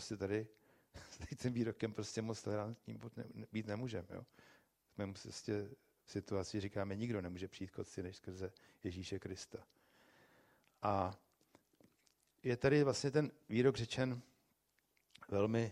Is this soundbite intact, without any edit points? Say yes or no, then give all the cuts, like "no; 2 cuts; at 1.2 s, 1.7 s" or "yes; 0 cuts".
yes; 0 cuts